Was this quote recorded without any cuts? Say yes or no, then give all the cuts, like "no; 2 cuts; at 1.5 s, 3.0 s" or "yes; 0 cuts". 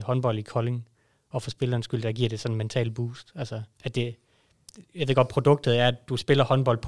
no; 1 cut; at 3.7 s